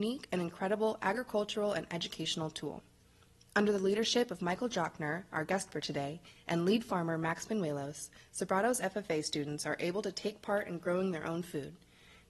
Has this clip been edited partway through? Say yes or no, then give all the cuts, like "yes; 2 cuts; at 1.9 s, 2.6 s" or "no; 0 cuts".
no; 0 cuts